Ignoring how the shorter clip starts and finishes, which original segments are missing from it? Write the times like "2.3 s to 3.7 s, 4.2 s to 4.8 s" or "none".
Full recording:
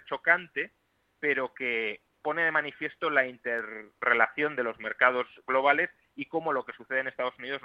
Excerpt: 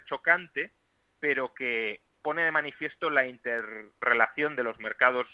none